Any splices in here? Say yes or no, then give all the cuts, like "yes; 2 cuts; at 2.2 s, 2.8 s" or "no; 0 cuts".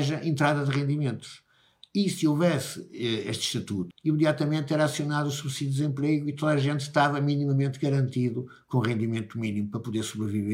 yes; 1 cut; at 3.9 s